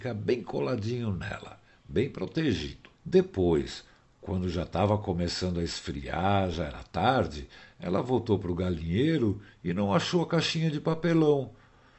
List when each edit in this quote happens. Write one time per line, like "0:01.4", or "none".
0:02.9